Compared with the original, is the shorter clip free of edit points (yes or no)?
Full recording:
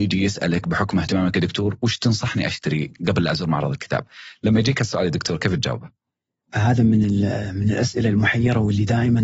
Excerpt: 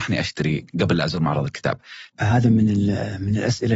no